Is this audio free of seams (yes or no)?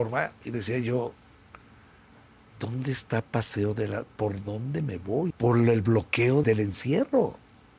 no